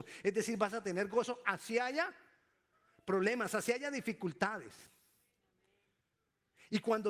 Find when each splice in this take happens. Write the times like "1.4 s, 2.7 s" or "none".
none

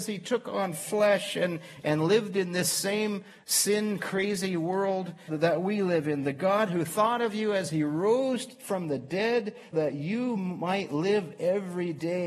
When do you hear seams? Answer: 5.3 s, 9.7 s

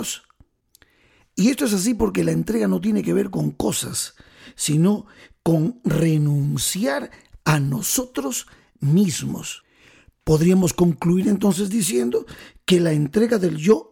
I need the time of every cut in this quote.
none

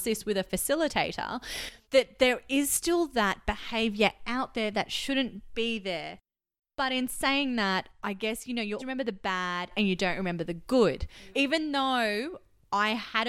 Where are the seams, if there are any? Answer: 1.8 s, 8.8 s, 11.3 s

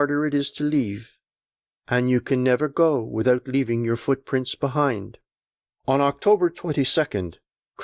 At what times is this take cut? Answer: 5.7 s

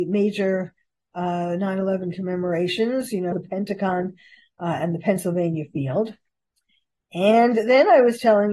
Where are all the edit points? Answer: 3.3 s

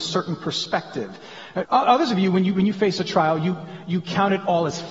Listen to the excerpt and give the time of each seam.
1.6 s

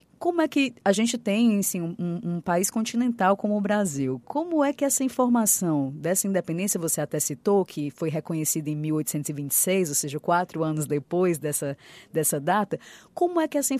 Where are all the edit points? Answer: none

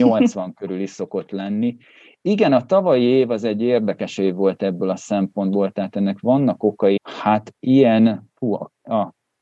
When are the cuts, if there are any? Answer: 7.0 s

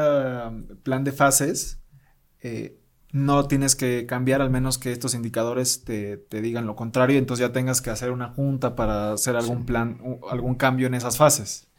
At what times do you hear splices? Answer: none

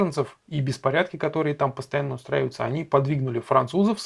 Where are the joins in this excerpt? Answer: none

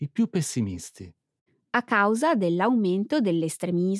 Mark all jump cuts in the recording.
none

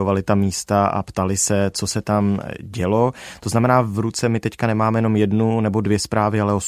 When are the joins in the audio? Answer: none

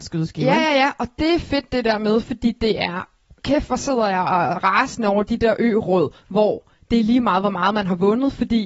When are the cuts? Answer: none

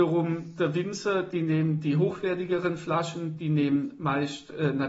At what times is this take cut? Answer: none

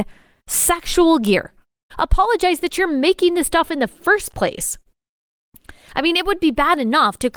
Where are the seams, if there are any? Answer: 1.9 s

